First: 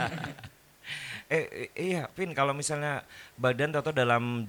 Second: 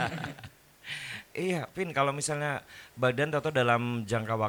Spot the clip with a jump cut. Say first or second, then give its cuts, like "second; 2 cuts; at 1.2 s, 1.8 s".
second; 1 cut; at 1.3 s